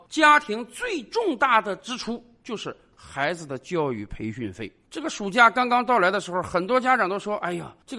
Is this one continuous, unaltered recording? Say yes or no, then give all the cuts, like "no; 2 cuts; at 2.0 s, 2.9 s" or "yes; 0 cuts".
yes; 0 cuts